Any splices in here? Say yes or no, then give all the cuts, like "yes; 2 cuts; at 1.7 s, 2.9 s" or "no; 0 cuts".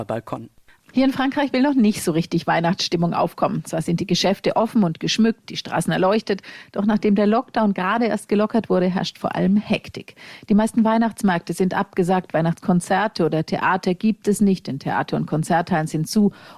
no; 0 cuts